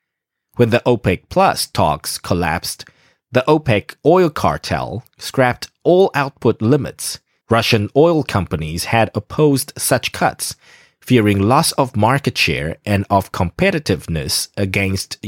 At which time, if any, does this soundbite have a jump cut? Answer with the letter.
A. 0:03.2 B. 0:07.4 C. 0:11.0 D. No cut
B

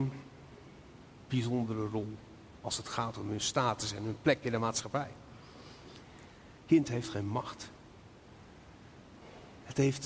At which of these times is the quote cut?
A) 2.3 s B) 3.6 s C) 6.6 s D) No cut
C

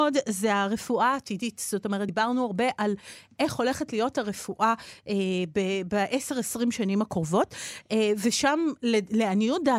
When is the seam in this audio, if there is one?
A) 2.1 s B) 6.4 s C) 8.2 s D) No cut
D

